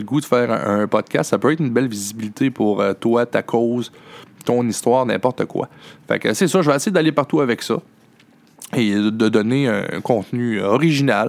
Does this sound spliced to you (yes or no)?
no